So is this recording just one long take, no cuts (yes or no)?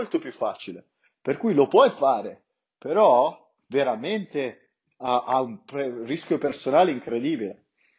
yes